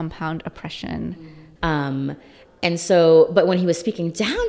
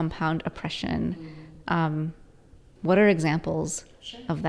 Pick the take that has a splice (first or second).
first